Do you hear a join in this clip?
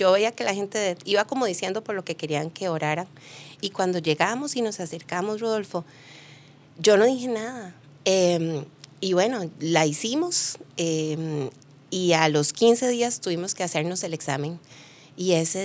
yes; 2 cuts; at 3.6 s, 8.0 s

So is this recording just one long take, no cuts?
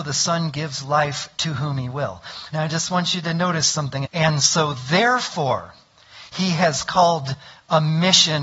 no; 2 cuts; at 2.5 s, 4.1 s

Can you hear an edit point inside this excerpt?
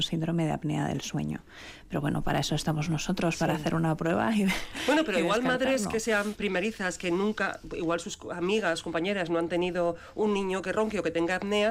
no; 0 cuts

